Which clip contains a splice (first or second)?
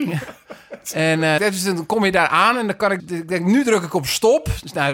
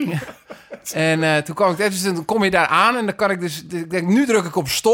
first